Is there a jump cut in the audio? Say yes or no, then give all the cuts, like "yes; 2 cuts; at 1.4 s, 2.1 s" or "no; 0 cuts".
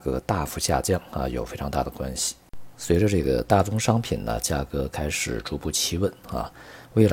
no; 0 cuts